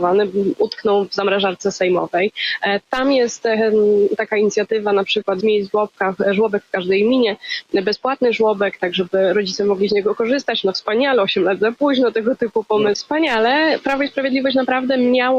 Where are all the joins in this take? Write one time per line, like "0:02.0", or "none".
0:05.4
0:12.9